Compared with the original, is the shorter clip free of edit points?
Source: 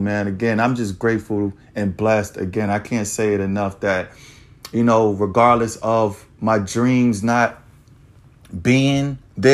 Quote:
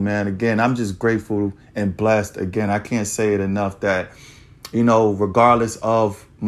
yes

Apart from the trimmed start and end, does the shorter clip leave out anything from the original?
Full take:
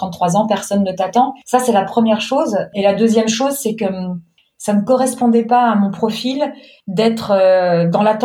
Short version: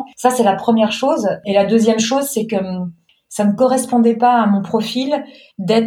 no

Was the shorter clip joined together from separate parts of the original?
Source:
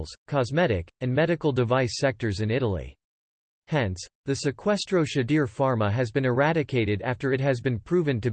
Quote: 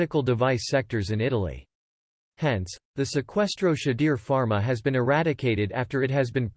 no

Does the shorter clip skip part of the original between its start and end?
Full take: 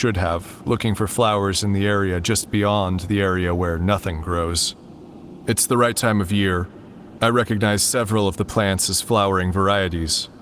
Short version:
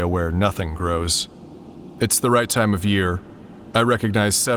no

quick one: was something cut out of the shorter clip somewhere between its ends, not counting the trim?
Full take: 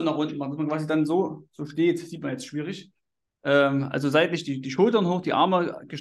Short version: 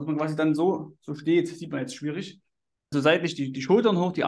yes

